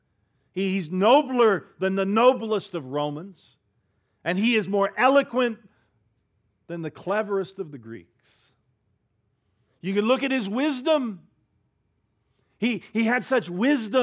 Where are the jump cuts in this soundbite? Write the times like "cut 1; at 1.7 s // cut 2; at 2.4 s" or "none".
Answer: cut 1; at 9.6 s